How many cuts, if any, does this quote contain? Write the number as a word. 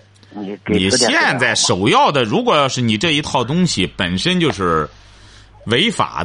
zero